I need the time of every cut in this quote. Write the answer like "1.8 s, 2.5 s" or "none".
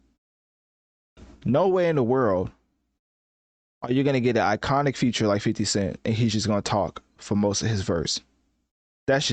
none

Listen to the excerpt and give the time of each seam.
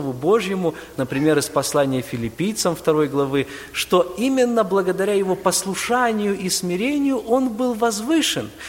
0.9 s

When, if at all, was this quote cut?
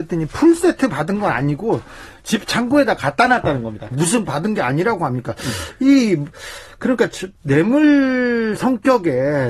3.9 s

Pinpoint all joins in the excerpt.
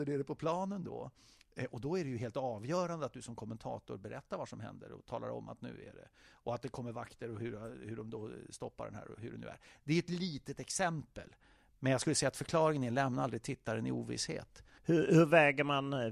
14.8 s

